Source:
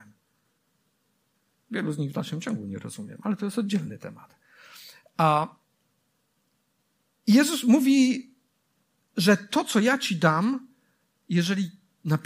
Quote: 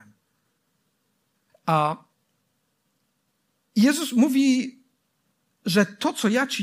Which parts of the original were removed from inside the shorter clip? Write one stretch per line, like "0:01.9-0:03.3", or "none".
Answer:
0:01.5-0:05.0